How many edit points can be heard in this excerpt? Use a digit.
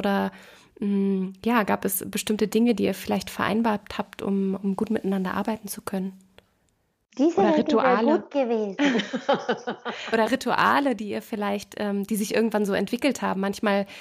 0